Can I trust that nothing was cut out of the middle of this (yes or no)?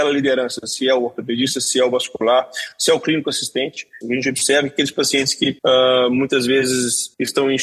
no